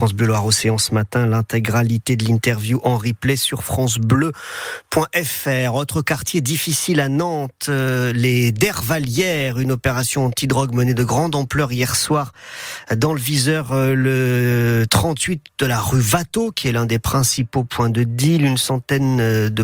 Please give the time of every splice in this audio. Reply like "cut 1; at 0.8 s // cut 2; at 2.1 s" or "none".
none